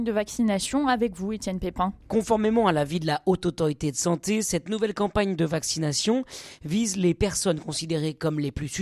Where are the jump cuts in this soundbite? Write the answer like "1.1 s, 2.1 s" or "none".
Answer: 2.0 s